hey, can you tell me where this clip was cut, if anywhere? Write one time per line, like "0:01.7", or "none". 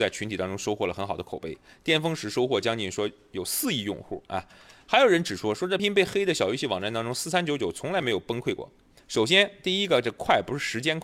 0:05.8
0:09.0